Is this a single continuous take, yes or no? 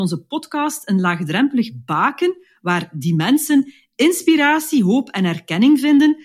yes